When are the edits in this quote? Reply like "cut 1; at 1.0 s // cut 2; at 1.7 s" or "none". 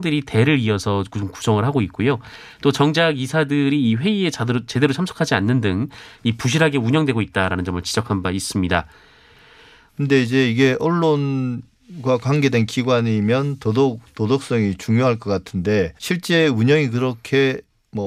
cut 1; at 9.9 s // cut 2; at 16.0 s